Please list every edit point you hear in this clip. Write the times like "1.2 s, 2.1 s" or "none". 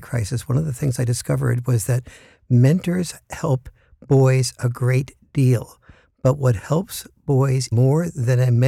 7.7 s